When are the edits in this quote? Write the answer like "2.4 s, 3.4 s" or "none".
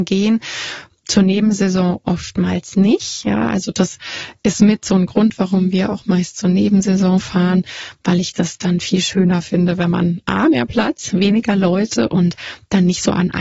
none